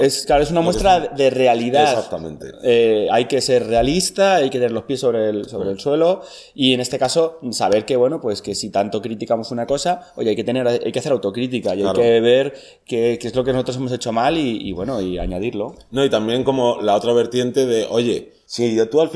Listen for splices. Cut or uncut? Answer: uncut